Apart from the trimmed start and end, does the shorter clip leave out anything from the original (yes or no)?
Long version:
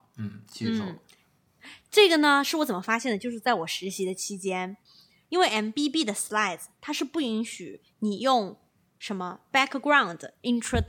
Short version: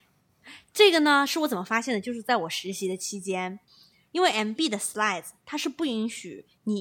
yes